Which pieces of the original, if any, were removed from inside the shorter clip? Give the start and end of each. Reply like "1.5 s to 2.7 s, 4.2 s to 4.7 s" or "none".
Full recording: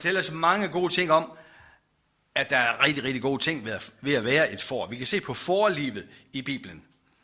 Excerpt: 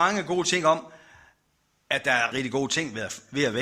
2.8 s to 3.0 s